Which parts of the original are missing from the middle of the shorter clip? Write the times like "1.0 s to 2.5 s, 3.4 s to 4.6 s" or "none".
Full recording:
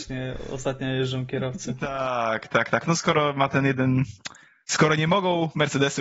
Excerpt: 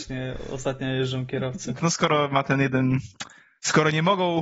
1.8 s to 2.8 s